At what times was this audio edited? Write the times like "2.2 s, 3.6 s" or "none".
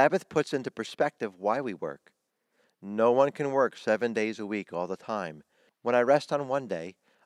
5.7 s